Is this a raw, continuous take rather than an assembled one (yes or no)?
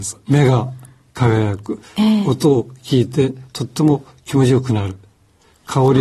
yes